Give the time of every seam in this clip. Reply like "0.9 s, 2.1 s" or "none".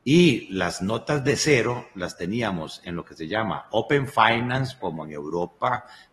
4.8 s